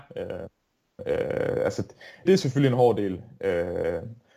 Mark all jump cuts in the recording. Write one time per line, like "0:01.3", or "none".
0:01.0
0:02.3